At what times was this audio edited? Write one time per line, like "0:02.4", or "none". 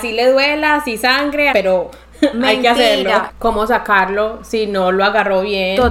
0:01.5
0:03.3